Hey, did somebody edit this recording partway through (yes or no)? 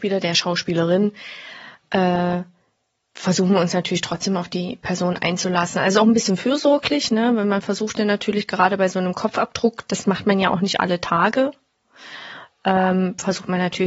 no